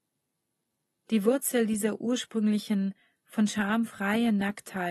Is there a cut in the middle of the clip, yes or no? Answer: no